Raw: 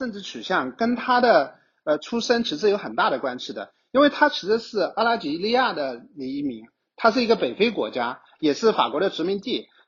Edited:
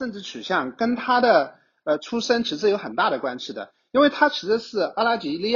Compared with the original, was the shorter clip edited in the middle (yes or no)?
no